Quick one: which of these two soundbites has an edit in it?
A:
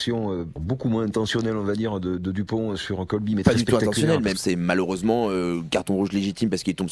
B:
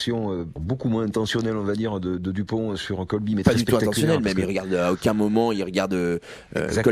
A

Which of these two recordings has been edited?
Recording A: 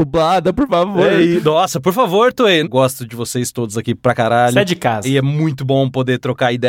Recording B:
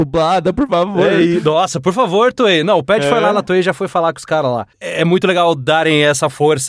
A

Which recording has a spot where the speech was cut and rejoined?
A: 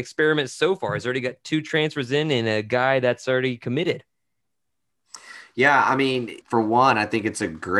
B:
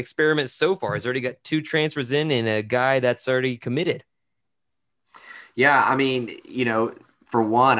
A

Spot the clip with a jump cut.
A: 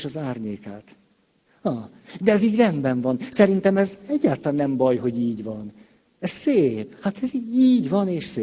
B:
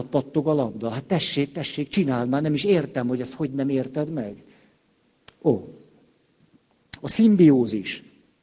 B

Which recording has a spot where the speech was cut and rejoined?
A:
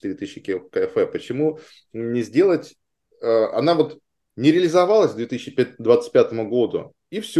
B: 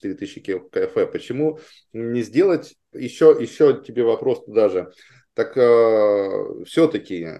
B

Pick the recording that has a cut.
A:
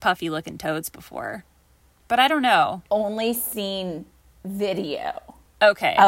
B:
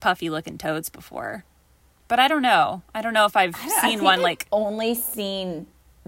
A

